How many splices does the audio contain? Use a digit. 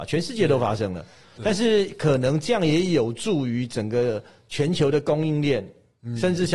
0